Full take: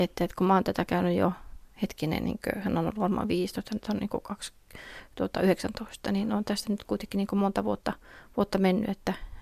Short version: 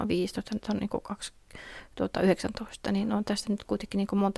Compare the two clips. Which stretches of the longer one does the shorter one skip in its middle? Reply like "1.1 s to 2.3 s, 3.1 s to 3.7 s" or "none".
none